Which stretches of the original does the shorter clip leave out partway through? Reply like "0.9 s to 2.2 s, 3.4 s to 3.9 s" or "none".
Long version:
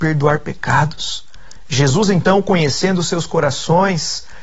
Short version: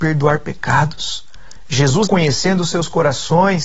2.1 s to 2.4 s